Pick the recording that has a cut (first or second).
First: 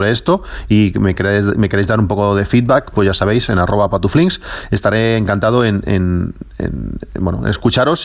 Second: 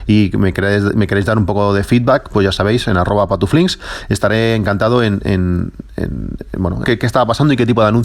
second